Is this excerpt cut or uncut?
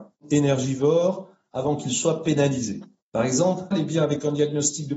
cut